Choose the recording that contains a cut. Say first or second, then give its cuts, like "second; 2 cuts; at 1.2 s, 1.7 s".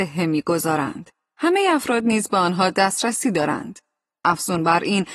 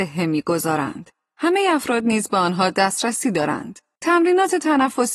second; 1 cut; at 4.0 s